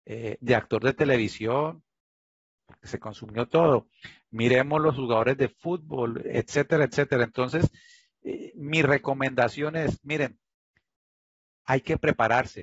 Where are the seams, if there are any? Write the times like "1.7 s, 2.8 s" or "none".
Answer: none